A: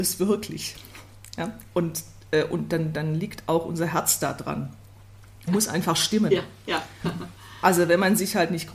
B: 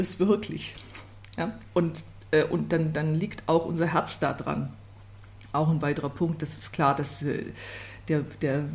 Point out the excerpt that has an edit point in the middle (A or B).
A